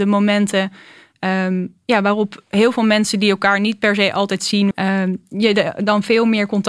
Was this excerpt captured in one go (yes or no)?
no